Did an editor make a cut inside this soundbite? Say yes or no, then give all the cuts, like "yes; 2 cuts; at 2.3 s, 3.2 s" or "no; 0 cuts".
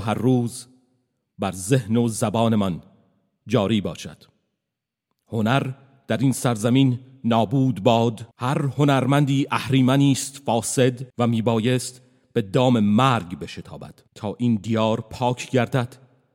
yes; 3 cuts; at 8.3 s, 11.1 s, 14.1 s